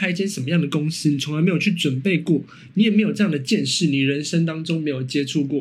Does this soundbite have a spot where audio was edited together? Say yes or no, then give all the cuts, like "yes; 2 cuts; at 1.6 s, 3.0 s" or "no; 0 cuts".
no; 0 cuts